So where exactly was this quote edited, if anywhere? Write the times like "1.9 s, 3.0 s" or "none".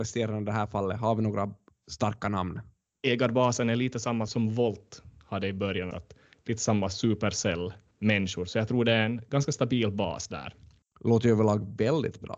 4.3 s, 5.9 s